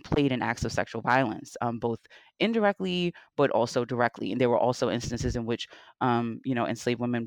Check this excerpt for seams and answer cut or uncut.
uncut